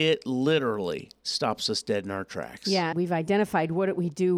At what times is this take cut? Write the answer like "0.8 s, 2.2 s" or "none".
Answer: 2.9 s